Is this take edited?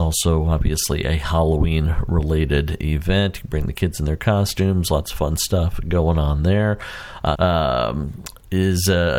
yes; 1 cut; at 7.3 s

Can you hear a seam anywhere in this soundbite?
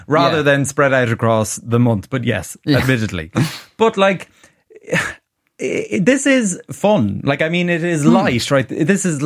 no; 0 cuts

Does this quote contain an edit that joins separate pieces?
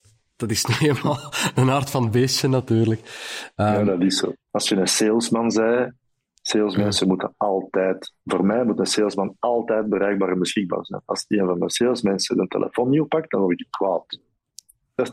yes; 1 cut; at 4.5 s

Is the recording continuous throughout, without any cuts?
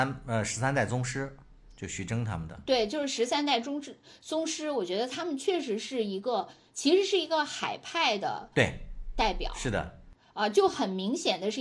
yes; 0 cuts

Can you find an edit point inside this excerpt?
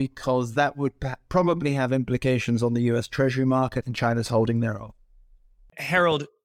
no; 0 cuts

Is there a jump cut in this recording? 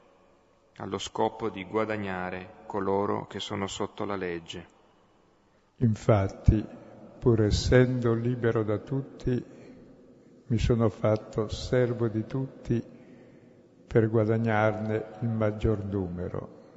yes; 1 cut; at 5.6 s

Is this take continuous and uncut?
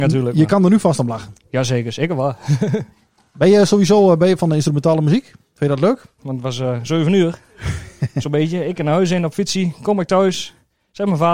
no; 1 cut; at 6.2 s

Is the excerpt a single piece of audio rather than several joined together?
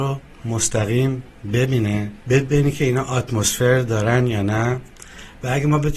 no; 1 cut; at 2.2 s

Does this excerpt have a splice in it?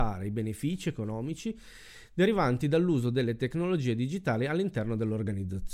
no; 0 cuts

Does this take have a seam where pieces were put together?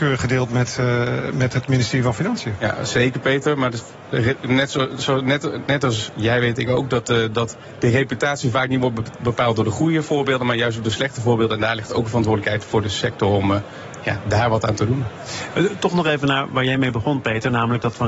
no; 0 cuts

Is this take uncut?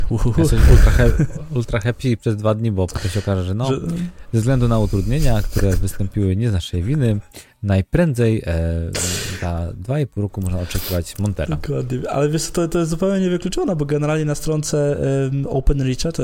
yes; 0 cuts

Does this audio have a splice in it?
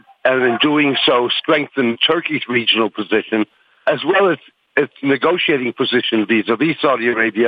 no; 0 cuts

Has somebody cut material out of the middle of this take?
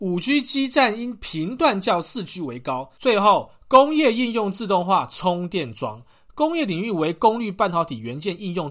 yes; 1 cut; at 3.0 s

